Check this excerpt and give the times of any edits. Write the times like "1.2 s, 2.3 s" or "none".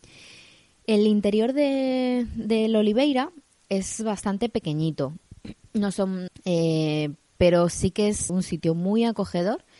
6.3 s, 8.3 s